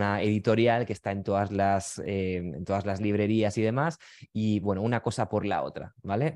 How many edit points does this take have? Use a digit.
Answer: 0